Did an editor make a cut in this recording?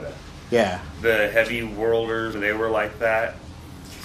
yes; 1 cut; at 2.3 s

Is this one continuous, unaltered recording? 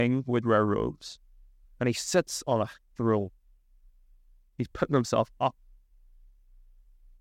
yes; 0 cuts

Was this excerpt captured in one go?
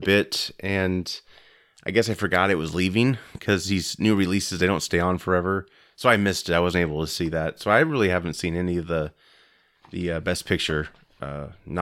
yes; 0 cuts

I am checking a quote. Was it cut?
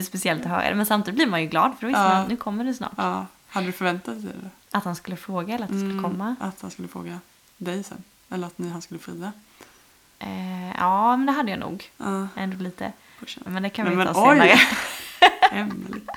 yes; 1 cut; at 13.5 s

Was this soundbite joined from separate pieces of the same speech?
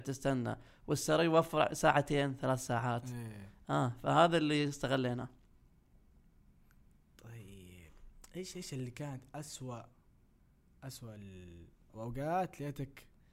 yes; 1 cut; at 11.9 s

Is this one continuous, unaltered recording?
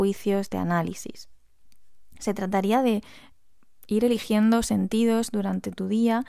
yes; 0 cuts

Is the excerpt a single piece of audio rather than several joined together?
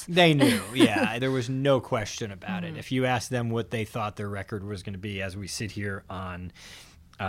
yes; 0 cuts

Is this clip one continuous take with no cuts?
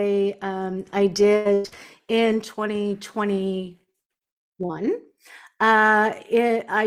yes; 0 cuts

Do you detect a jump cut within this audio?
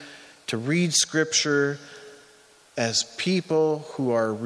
no; 0 cuts

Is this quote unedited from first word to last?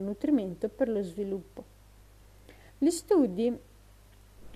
no; 1 cut; at 2.7 s

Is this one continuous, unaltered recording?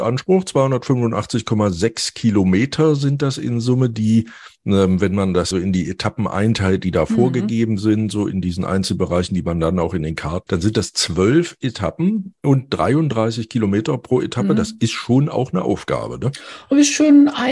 no; 2 cuts; at 5.5 s, 10.5 s

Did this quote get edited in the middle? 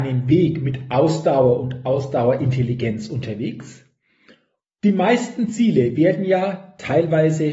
yes; 1 cut; at 4.6 s

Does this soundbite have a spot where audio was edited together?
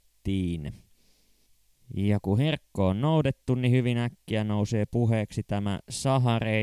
yes; 1 cut; at 1.8 s

